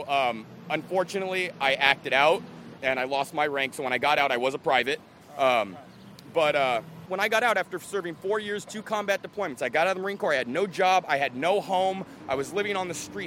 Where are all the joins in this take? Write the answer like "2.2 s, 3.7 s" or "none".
2.8 s, 12.2 s